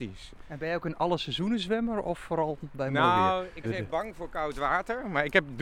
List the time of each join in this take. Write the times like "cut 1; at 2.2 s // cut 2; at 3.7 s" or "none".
cut 1; at 3.6 s